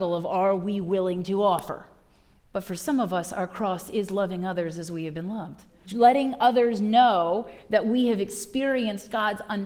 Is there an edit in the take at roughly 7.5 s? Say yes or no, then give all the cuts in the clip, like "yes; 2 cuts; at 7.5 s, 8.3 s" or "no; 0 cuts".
no; 2 cuts; at 2.4 s, 5.8 s